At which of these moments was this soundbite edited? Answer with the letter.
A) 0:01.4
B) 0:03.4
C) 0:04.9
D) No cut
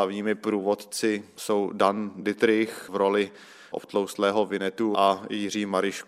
C